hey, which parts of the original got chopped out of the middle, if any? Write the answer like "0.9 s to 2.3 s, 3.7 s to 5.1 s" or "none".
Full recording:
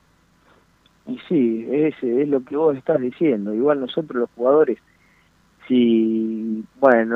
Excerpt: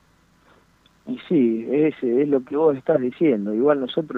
none